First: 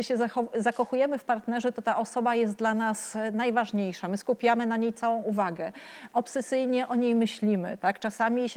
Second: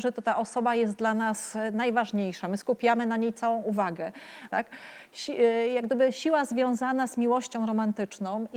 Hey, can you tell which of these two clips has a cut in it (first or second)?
second